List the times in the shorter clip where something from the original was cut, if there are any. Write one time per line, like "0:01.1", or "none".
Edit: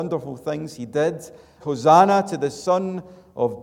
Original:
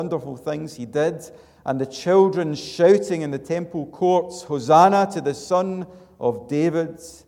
0:01.6